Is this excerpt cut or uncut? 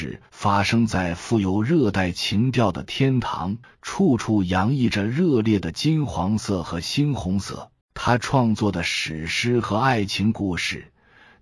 cut